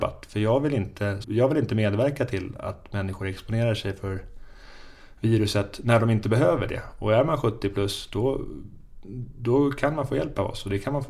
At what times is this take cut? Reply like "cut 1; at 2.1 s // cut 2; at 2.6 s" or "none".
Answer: cut 1; at 1.2 s